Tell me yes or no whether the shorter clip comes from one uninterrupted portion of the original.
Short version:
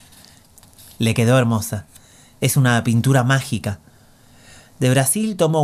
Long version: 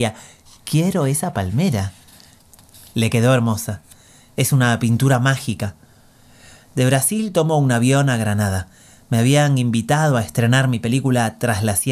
yes